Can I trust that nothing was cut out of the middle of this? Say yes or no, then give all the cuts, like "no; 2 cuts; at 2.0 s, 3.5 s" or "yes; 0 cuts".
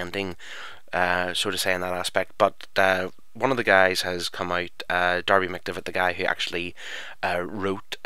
yes; 0 cuts